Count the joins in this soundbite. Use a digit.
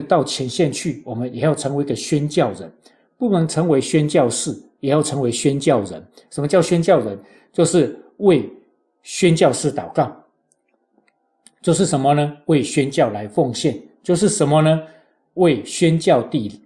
0